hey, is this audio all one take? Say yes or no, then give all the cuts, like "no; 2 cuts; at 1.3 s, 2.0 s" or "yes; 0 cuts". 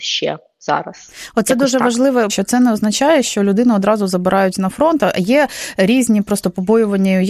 no; 1 cut; at 2.3 s